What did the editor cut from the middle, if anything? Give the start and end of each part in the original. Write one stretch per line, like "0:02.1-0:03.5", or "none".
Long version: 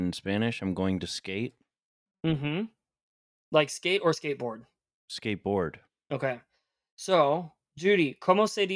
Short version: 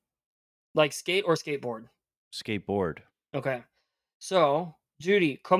none